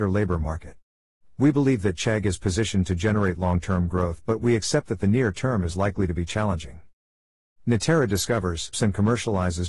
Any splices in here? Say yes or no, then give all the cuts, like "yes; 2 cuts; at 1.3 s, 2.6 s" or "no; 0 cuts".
yes; 1 cut; at 8.7 s